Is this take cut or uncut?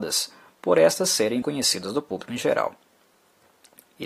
cut